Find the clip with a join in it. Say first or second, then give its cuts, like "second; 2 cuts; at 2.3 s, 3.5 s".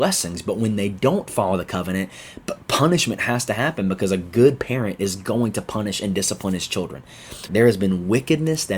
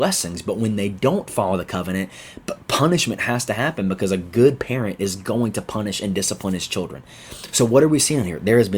first; 1 cut; at 7.5 s